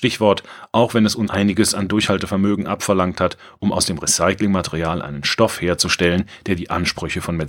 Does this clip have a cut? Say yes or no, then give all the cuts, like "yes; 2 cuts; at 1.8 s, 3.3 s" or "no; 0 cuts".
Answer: yes; 1 cut; at 1.3 s